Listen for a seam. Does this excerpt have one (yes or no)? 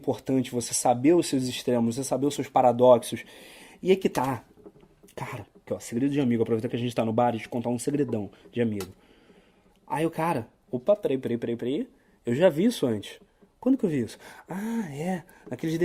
yes